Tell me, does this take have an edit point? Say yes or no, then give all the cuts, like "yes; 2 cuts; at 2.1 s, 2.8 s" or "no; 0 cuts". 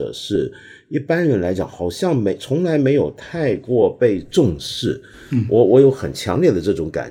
no; 0 cuts